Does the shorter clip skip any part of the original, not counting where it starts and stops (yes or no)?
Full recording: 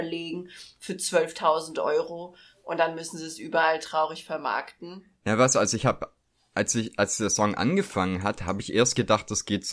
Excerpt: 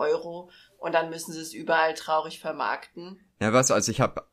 no